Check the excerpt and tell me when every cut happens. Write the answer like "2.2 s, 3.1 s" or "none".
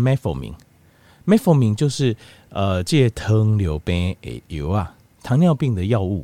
none

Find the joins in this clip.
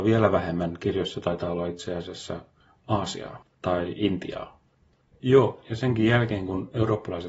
5.1 s

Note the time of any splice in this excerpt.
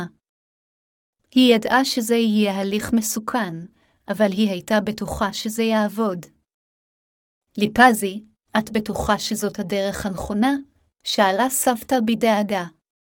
none

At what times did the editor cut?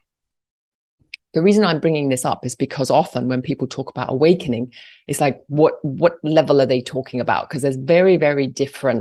none

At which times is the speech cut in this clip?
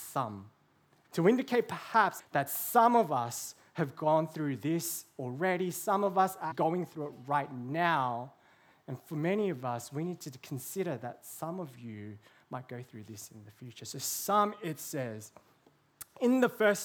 1.0 s, 2.2 s, 6.5 s

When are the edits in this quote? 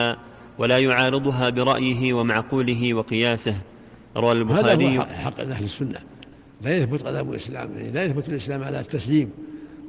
5.0 s

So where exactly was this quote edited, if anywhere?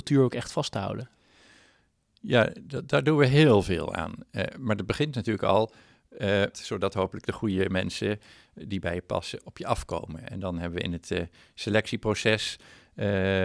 6.5 s

